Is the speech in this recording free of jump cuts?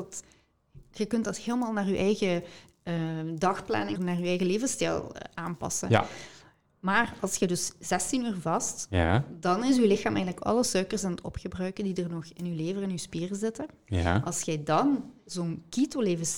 no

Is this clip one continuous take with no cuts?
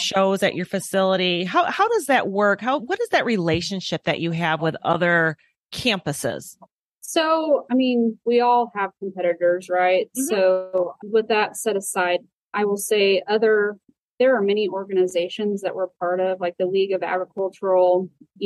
yes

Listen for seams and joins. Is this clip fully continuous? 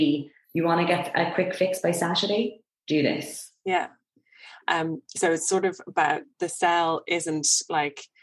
no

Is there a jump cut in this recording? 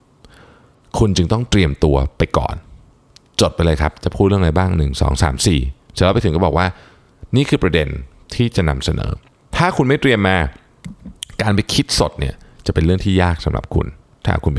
no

